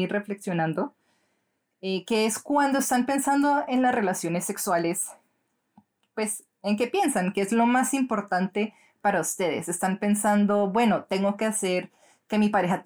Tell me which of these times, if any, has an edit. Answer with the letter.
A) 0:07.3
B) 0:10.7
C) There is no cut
C